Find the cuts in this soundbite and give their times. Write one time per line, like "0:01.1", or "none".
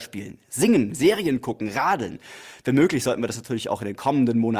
none